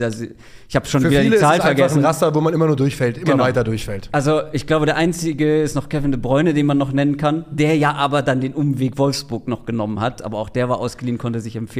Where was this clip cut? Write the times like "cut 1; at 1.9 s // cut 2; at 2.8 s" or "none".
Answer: none